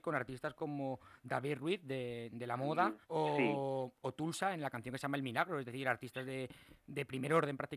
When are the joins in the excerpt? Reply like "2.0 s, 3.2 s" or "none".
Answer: 3.0 s